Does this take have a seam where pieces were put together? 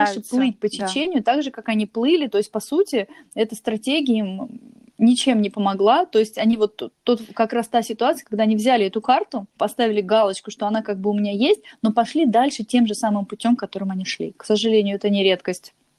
yes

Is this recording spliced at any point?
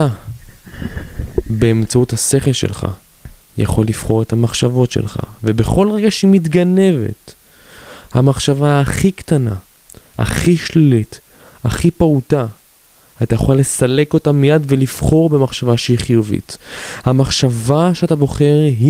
no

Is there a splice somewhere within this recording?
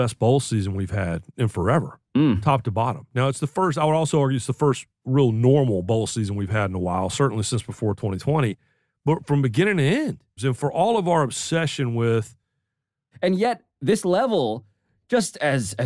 yes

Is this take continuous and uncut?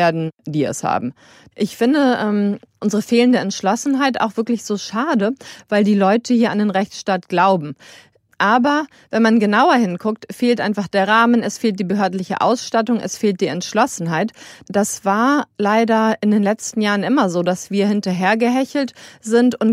yes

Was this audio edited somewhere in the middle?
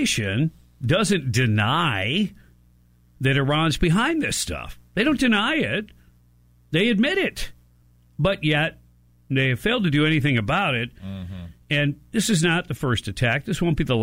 no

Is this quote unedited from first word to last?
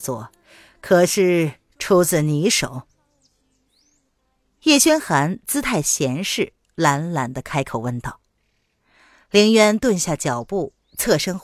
yes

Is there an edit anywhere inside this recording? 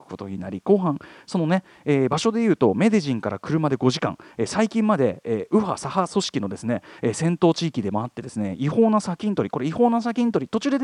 no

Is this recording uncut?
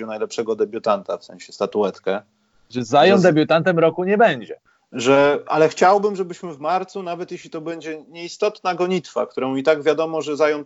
yes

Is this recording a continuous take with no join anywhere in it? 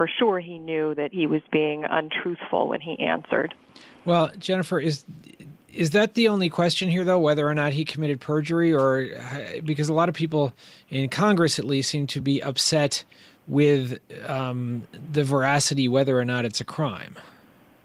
yes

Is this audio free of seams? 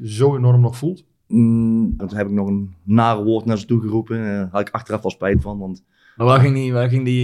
no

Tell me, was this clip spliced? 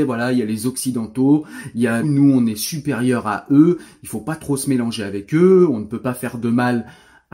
yes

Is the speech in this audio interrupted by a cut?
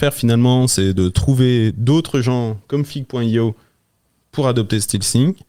no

